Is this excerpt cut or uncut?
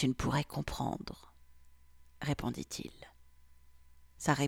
uncut